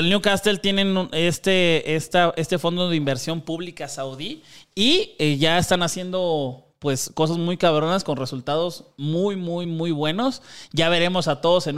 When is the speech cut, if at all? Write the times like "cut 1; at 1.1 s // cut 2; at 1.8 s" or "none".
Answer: none

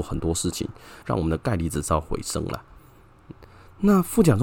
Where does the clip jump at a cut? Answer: cut 1; at 1.0 s

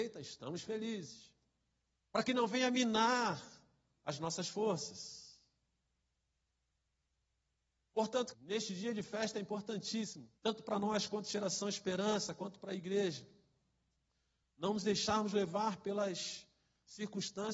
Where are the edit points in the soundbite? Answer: cut 1; at 1.9 s // cut 2; at 8.3 s // cut 3; at 10.4 s

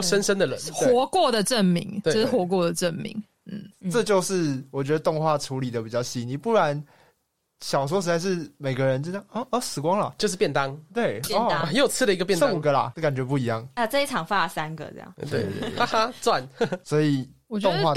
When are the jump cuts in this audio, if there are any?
none

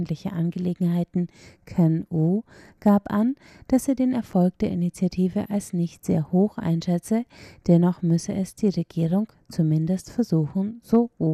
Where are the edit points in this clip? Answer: none

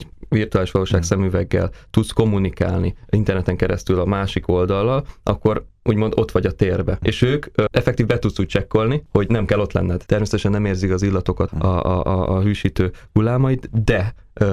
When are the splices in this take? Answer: cut 1; at 10.1 s // cut 2; at 11.5 s

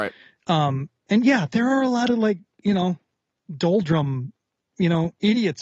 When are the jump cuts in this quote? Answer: none

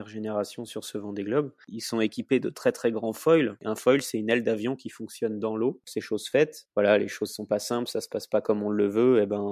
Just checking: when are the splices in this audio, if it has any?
cut 1; at 5.8 s

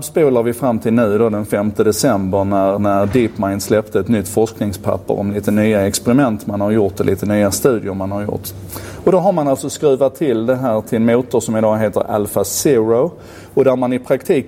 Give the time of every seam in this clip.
none

